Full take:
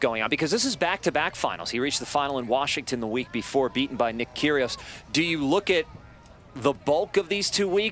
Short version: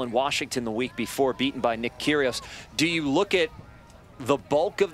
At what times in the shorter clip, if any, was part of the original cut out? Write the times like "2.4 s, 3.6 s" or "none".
none